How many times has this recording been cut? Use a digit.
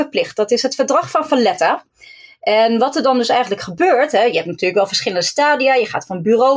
0